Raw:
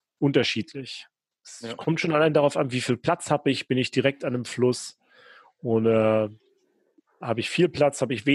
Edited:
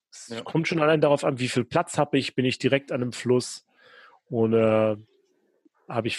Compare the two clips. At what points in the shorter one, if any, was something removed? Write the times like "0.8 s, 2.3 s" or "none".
none